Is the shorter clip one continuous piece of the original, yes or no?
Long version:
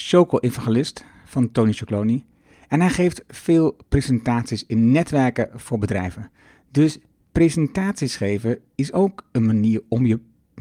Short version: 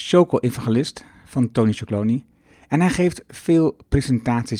yes